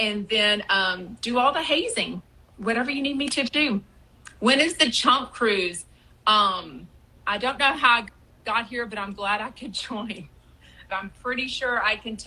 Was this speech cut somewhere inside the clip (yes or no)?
yes